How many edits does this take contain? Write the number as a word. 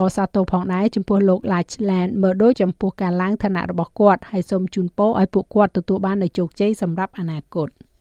one